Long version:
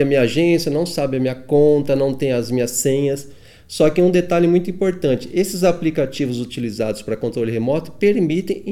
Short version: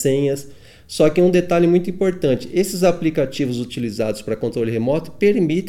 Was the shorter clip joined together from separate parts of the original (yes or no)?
no